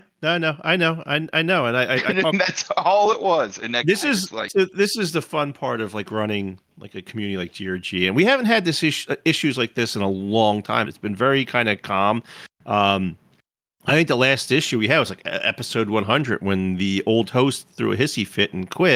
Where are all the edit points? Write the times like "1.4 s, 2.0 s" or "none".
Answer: 10.8 s